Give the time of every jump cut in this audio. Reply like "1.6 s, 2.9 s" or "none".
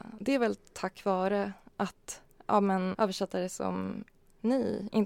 2.9 s